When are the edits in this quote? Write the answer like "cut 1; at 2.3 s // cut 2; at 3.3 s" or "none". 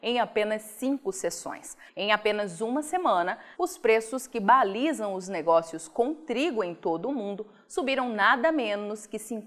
cut 1; at 1.9 s // cut 2; at 3.5 s

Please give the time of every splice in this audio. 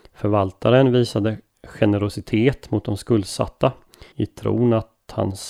cut 1; at 1.5 s // cut 2; at 4.1 s

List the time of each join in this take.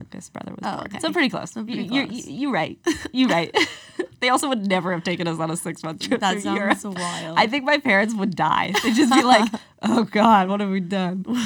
none

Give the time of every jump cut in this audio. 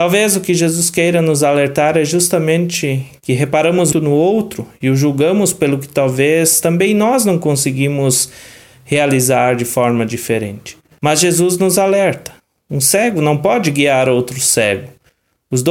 cut 1; at 3.9 s // cut 2; at 11.0 s

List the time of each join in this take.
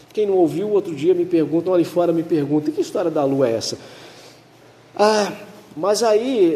cut 1; at 1.7 s

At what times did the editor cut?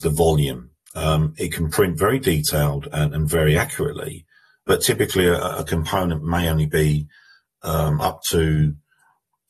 cut 1; at 4.6 s

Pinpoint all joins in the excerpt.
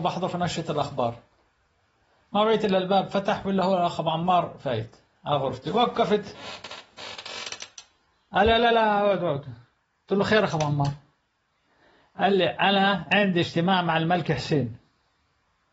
none

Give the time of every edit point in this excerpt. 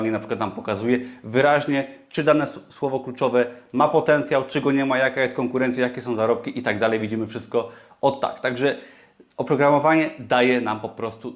none

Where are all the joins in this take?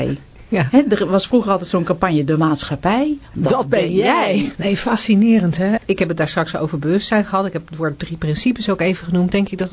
cut 1; at 4.6 s // cut 2; at 5.8 s

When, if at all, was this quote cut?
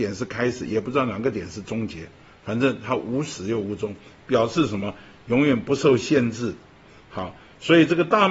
none

